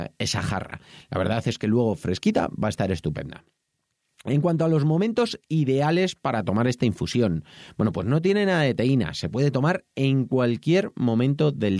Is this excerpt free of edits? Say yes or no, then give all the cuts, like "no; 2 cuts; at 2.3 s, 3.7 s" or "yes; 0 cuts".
yes; 0 cuts